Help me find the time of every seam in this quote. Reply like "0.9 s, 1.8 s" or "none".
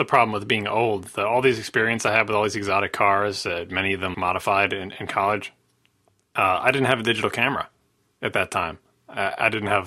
4.1 s